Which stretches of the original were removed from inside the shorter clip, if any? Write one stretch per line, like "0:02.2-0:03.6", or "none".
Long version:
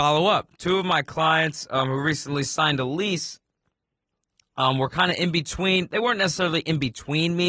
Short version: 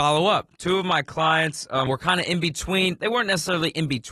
0:01.9-0:04.8